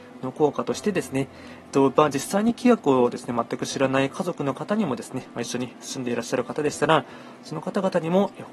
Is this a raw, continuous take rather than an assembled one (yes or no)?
yes